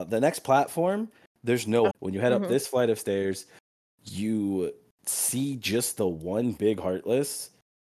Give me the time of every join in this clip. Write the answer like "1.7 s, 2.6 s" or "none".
1.9 s